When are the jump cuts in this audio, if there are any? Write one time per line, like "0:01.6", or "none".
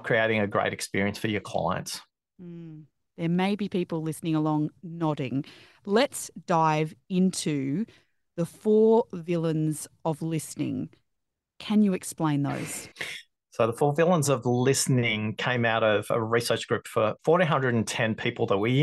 0:12.9
0:17.2